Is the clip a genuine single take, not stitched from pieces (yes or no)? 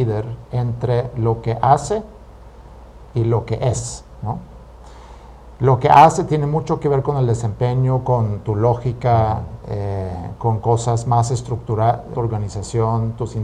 no